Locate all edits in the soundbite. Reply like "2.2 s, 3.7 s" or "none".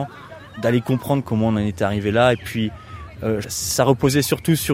3.4 s